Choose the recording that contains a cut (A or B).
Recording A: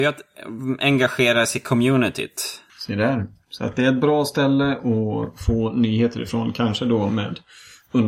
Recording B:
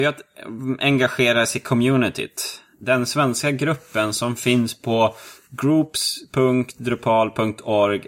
A